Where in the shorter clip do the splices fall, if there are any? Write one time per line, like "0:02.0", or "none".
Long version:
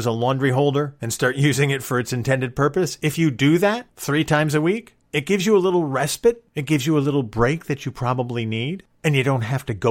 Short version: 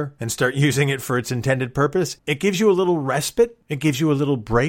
0:02.2